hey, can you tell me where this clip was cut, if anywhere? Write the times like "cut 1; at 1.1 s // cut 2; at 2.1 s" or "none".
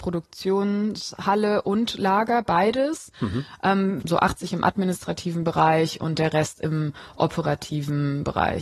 cut 1; at 4.0 s

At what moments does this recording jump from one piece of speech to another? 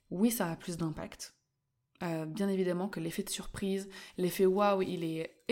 none

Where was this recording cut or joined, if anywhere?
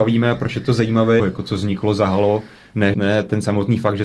cut 1; at 1.2 s // cut 2; at 2.9 s

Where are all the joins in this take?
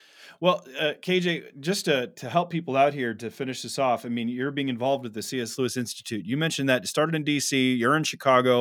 cut 1; at 5.6 s

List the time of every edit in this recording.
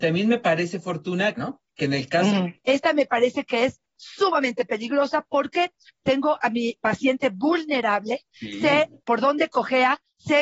cut 1; at 1.3 s // cut 2; at 2.6 s // cut 3; at 5.9 s

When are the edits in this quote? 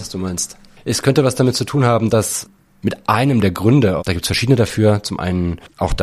cut 1; at 4.0 s

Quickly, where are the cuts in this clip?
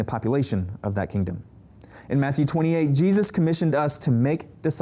none

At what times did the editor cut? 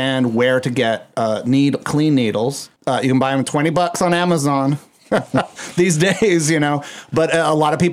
cut 1; at 2.8 s

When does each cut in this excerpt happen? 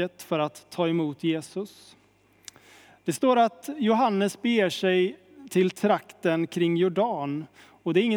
none

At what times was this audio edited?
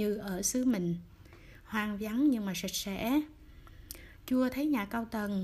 none

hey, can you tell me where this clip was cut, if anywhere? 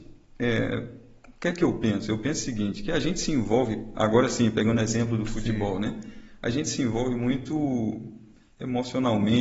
none

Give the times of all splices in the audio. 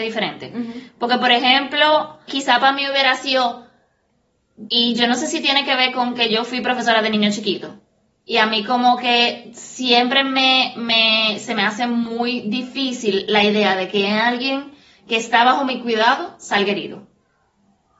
cut 1; at 2.3 s // cut 2; at 4.7 s

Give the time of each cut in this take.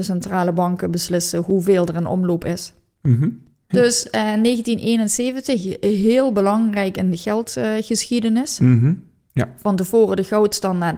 cut 1; at 3.7 s

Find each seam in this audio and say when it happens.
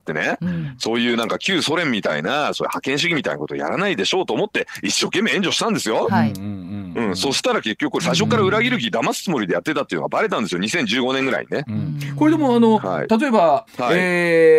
cut 1; at 8.0 s // cut 2; at 13.7 s

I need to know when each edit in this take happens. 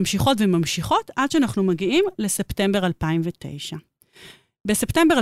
none

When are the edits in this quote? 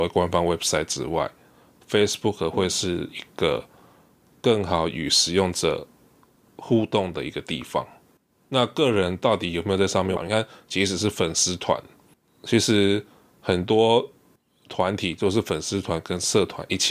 cut 1; at 10.2 s

